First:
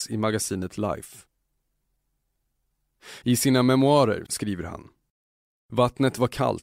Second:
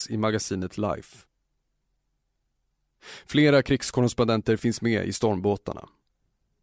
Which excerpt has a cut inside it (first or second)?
first